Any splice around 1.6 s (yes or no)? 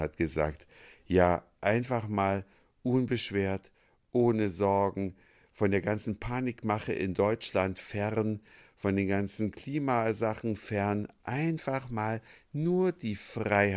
no